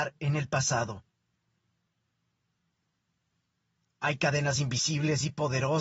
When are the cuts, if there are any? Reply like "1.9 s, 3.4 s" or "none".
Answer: none

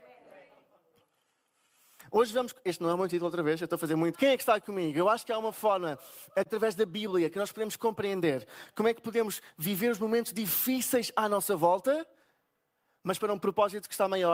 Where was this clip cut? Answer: 4.1 s

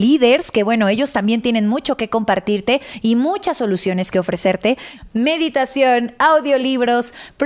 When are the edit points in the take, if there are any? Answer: 5.1 s

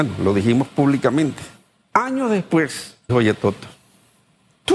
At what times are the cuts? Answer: 1.9 s, 3.1 s

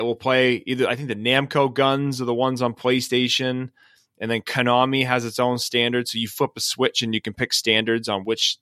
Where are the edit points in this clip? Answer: none

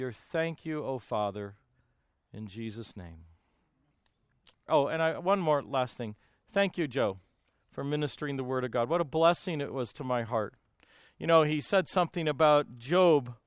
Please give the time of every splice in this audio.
4.7 s

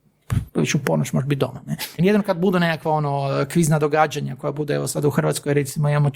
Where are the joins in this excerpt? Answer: 2.0 s

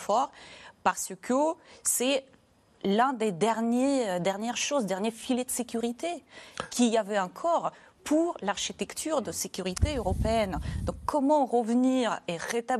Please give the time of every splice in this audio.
none

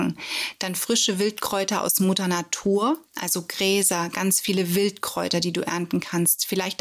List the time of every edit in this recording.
none

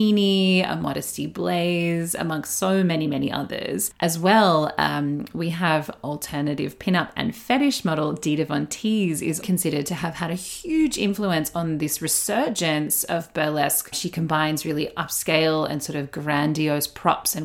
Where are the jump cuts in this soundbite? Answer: 9.4 s

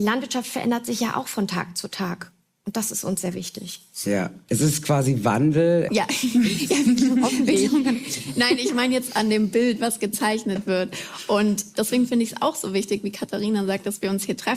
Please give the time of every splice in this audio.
5.9 s

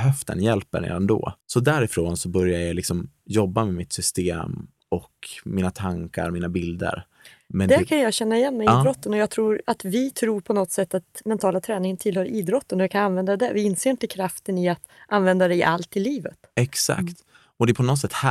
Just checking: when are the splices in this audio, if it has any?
1.4 s

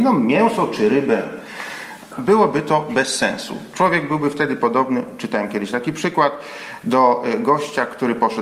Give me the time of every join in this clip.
2.1 s

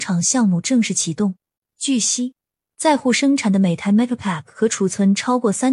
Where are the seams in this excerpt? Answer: 1.6 s

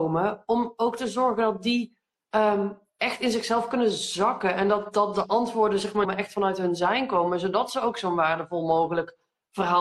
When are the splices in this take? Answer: 6.0 s

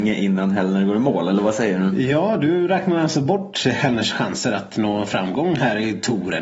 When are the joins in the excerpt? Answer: none

